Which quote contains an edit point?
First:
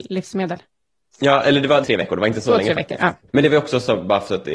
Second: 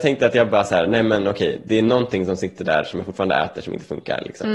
first; 2 cuts; at 1.8 s, 3.3 s

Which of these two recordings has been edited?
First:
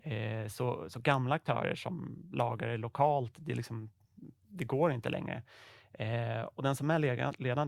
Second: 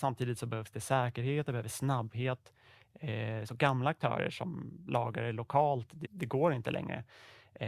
second; 2 cuts; at 3.4 s, 6.0 s

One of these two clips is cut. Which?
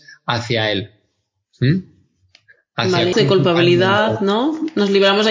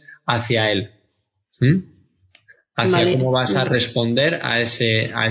first; 1 cut; at 3.1 s

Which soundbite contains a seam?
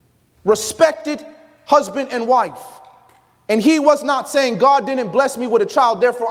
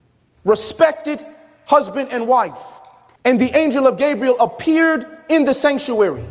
second; 1 cut; at 3.2 s

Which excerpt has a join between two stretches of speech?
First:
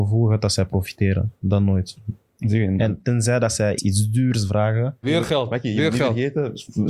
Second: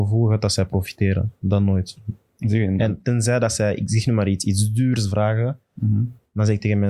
first; 2 cuts; at 3.8 s, 5.0 s

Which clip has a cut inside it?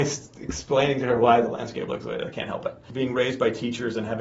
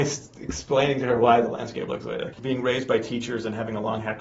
second; 1 cut; at 2.3 s

